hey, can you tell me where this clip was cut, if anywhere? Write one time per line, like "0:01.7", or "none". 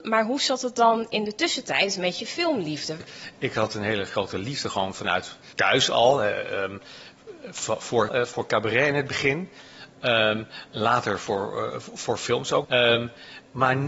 0:08.1
0:12.6